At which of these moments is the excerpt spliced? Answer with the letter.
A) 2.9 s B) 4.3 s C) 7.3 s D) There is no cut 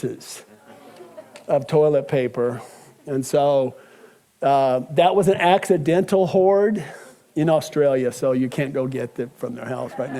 C